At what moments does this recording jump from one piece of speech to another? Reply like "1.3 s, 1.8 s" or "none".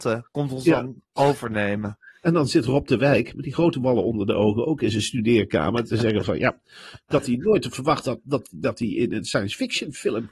none